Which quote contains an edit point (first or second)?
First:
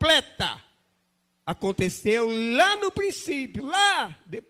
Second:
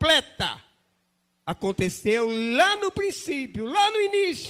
first